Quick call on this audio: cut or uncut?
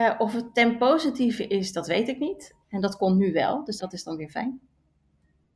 cut